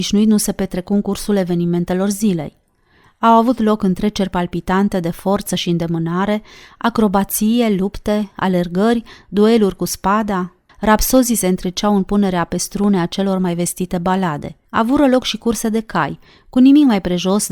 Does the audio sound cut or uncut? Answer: cut